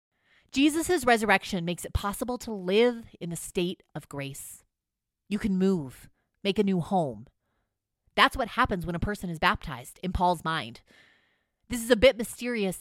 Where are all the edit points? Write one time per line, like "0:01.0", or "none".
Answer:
none